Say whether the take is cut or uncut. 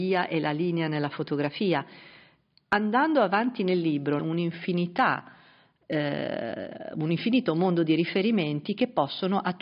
cut